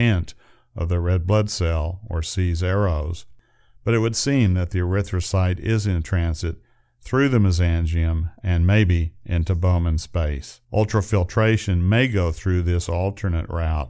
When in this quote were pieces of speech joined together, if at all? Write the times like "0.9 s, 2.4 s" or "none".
10.6 s